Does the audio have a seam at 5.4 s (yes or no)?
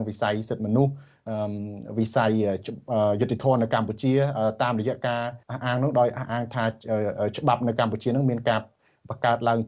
yes